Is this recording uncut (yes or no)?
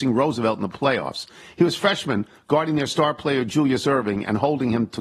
yes